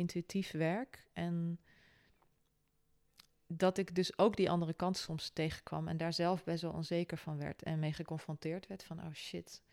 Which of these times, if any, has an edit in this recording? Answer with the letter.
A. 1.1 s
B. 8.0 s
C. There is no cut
C